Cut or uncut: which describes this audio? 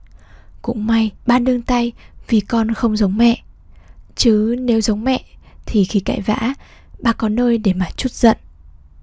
cut